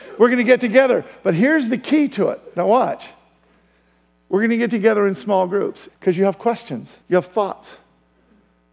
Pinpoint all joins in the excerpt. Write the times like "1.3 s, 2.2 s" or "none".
5.9 s, 7.0 s

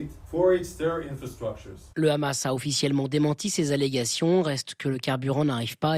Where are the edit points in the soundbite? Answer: none

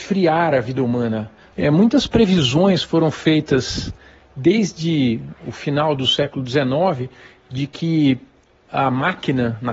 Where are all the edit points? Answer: 1.5 s

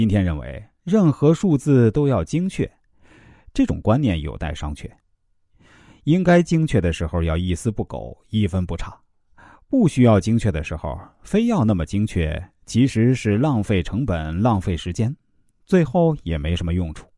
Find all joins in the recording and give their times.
none

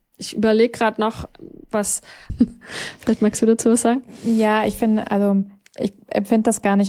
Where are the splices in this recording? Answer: 2.3 s

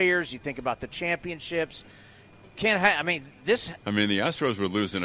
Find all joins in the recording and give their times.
3.8 s

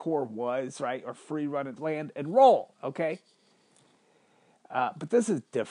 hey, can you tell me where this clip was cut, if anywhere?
1.8 s

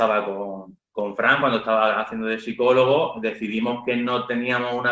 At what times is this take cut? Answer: none

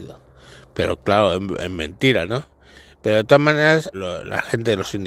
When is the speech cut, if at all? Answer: 3.9 s

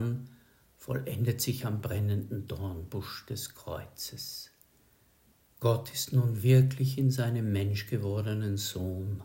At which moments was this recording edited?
none

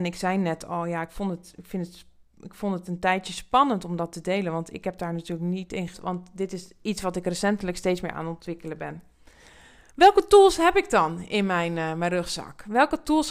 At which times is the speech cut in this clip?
5.9 s

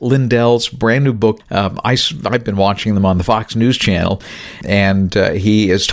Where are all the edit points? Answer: 1.4 s

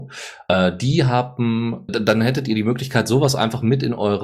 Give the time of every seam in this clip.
1.9 s

